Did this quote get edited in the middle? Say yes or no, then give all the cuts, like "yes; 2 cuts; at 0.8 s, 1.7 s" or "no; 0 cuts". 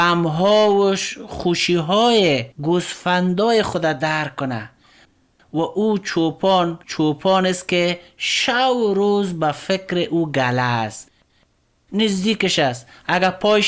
yes; 2 cuts; at 2.5 s, 6.8 s